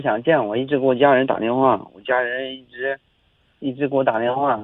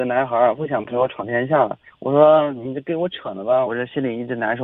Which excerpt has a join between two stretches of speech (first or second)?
second